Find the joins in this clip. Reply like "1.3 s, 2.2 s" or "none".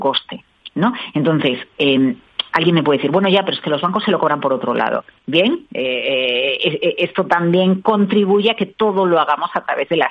5.2 s